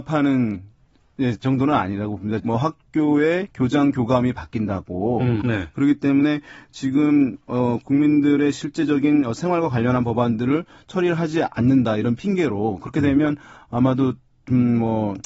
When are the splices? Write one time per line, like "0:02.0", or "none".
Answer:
0:02.4
0:05.4